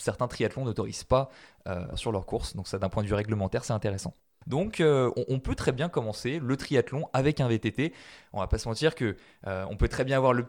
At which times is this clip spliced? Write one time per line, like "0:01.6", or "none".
0:01.9
0:04.4